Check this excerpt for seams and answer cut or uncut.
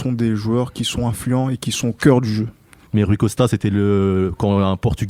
cut